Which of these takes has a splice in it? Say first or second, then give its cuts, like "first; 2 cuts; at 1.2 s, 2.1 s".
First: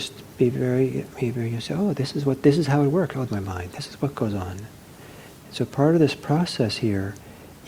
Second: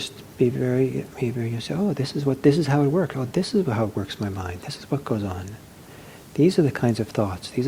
first; 2 cuts; at 3.3 s, 5.4 s